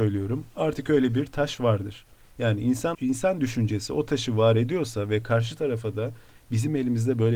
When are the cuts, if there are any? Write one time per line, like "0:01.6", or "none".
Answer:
0:02.9